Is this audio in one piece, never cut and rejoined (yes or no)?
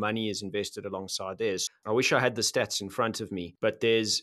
no